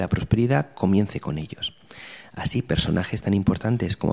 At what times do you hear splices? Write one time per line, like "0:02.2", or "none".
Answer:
none